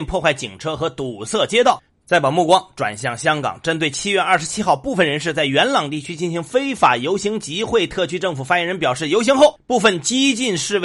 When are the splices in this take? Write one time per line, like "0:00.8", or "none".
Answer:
0:01.9